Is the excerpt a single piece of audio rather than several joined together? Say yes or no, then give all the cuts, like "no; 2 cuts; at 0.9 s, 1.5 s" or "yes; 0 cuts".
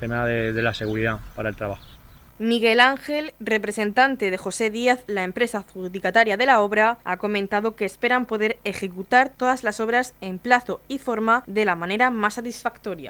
yes; 0 cuts